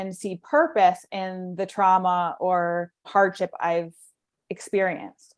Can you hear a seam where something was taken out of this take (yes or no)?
yes